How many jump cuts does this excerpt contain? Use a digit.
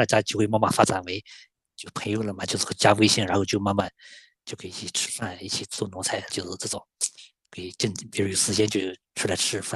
1